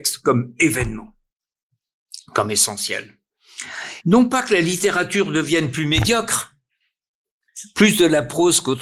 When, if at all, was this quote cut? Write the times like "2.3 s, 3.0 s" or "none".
4.0 s